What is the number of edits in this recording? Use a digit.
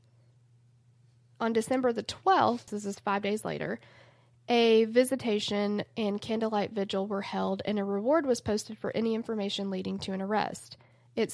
1